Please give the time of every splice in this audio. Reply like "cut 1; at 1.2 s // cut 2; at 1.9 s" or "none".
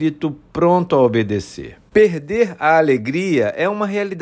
cut 1; at 1.9 s